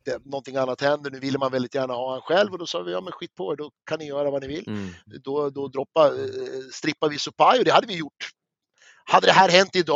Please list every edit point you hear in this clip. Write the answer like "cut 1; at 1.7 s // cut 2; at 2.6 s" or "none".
none